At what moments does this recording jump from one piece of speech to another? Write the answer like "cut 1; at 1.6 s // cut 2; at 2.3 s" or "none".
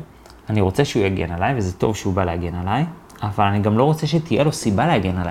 none